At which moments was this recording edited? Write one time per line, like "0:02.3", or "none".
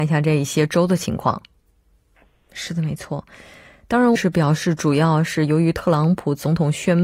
0:02.2
0:04.2

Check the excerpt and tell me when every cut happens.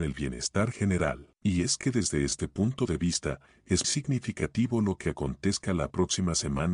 0:01.4
0:03.8

